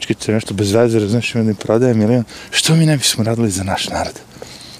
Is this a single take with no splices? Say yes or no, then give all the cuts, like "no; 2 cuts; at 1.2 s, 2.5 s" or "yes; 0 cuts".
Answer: yes; 0 cuts